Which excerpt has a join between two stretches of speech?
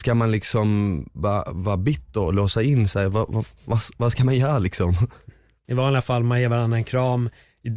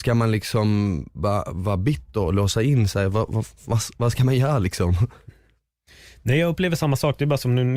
first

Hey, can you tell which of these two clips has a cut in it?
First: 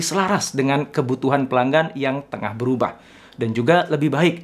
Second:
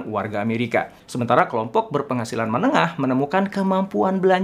second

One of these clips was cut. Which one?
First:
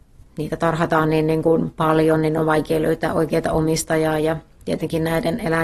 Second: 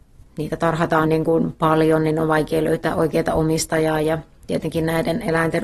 second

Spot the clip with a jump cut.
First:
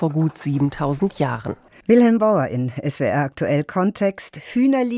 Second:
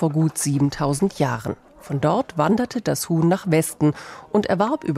first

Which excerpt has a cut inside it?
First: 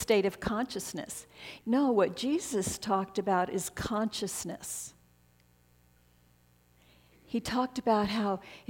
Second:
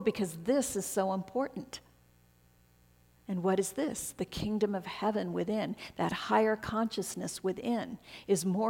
first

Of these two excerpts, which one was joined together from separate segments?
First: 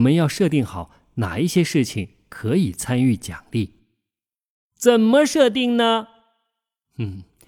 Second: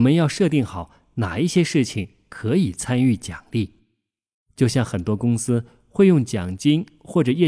second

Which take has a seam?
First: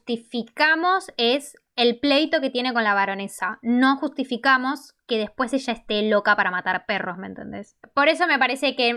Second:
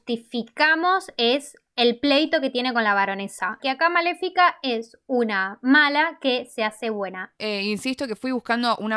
second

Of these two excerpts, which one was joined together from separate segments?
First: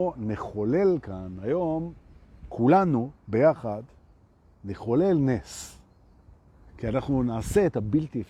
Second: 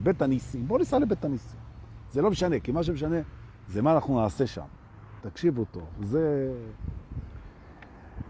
second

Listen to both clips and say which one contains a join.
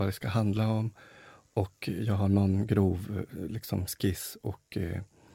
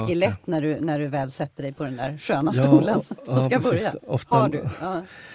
second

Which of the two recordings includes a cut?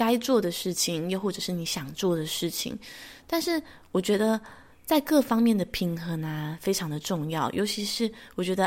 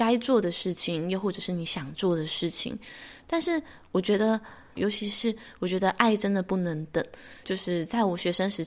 second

